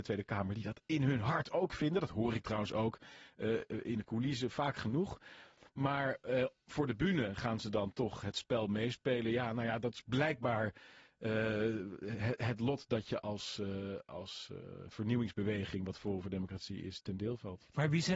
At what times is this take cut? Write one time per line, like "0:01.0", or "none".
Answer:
none